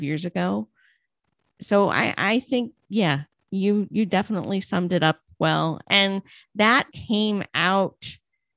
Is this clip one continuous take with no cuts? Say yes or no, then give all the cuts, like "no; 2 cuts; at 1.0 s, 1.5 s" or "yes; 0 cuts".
no; 2 cuts; at 5.8 s, 6.9 s